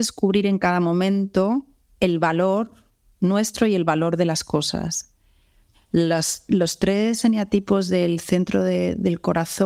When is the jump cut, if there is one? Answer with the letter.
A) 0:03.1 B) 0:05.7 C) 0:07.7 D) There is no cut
B